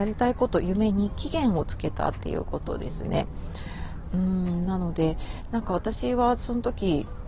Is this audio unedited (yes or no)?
no